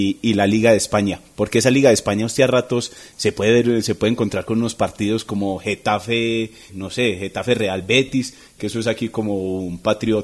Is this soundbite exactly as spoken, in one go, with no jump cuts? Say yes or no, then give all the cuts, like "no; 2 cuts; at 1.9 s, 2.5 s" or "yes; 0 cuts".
no; 1 cut; at 6.7 s